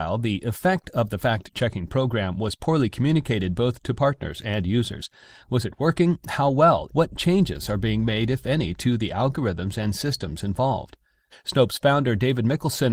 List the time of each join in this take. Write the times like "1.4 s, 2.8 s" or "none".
6.9 s, 11.3 s

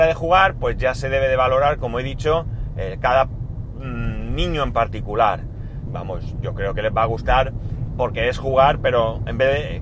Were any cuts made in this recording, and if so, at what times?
5.9 s

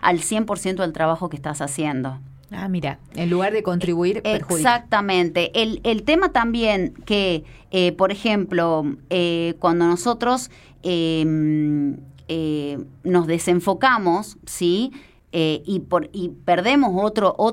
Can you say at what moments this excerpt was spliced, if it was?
none

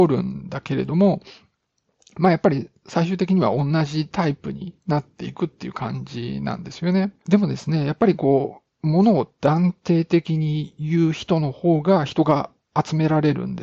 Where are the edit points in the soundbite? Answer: 7.2 s

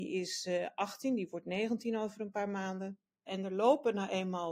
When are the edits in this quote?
3.3 s

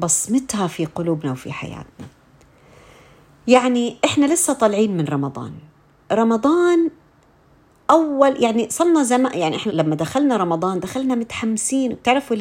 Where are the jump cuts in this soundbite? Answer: 9.7 s

